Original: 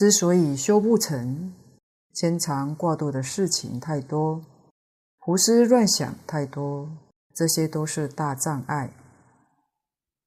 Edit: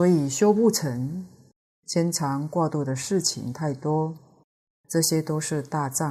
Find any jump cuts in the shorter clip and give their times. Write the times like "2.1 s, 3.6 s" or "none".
4.7 s